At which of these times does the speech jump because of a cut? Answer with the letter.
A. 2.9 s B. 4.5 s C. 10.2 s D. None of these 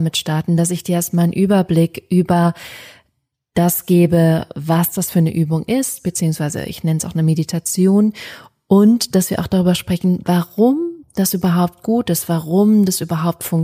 D